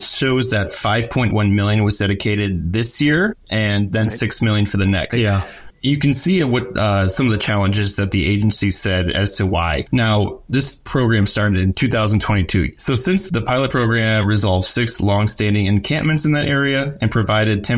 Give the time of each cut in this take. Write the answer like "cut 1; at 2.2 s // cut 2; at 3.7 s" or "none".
cut 1; at 5.1 s // cut 2; at 9.9 s // cut 3; at 13.3 s